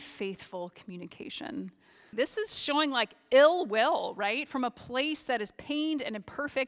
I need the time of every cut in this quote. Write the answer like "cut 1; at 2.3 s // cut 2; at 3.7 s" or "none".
cut 1; at 2.1 s